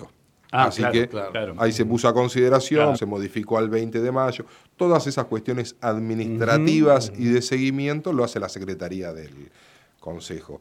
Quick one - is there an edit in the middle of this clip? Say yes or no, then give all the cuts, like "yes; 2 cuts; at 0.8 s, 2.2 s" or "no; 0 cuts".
yes; 1 cut; at 2.9 s